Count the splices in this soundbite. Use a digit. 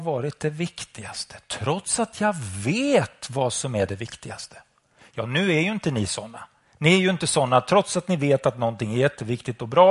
0